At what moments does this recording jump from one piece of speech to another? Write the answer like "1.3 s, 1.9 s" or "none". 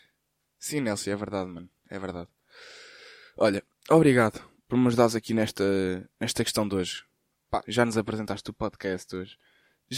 7.6 s